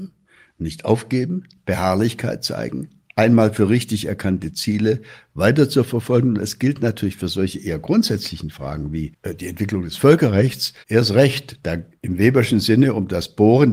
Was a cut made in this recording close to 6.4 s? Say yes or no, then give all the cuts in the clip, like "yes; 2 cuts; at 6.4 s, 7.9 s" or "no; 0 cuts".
no; 2 cuts; at 10.8 s, 11.9 s